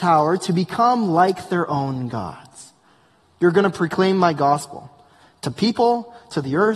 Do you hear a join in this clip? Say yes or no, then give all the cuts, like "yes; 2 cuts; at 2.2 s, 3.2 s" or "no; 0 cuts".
yes; 1 cut; at 3.2 s